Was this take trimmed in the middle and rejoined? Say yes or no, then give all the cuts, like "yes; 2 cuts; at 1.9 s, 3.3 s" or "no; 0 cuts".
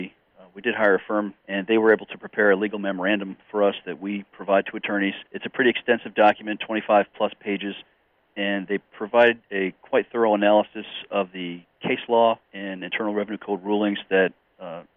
yes; 3 cuts; at 1.4 s, 5.3 s, 12.4 s